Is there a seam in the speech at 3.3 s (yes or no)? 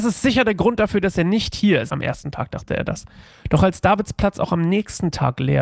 no